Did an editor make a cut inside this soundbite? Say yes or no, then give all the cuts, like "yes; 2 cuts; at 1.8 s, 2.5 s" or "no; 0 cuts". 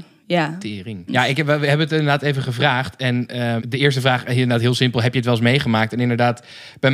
yes; 2 cuts; at 1.1 s, 3.6 s